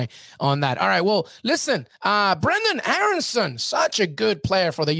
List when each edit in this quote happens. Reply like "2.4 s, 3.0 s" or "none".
none